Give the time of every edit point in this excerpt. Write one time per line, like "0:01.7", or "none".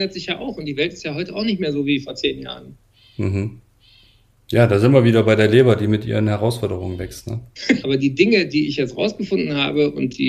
0:07.8